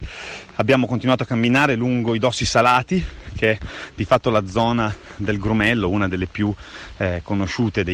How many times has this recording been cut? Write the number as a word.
zero